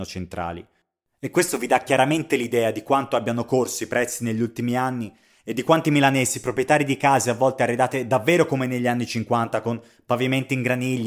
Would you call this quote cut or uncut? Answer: uncut